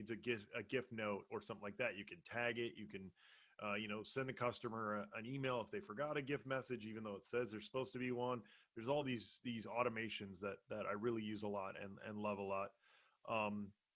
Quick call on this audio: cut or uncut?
uncut